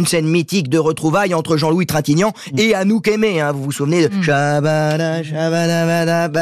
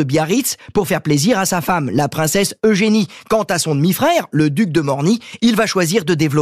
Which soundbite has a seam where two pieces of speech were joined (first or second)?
second